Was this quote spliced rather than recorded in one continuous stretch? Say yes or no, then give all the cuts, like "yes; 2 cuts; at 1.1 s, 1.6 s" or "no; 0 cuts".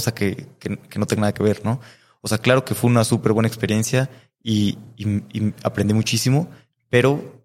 no; 0 cuts